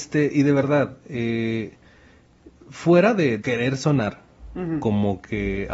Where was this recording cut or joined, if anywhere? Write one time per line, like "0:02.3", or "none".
0:03.4